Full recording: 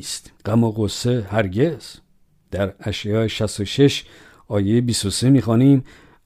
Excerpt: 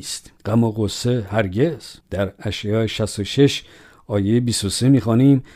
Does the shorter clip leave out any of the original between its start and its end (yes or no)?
yes